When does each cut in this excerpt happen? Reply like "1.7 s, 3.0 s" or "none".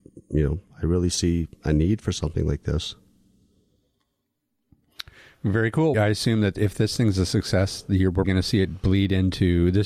5.9 s, 8.2 s